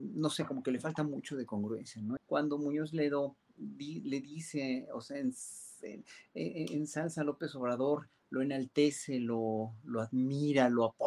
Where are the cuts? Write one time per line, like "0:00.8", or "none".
0:02.2